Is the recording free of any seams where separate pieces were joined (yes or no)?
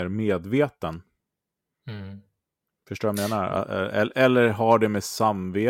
yes